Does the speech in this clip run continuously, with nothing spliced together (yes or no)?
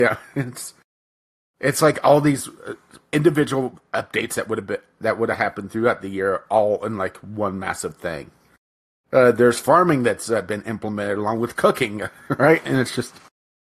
yes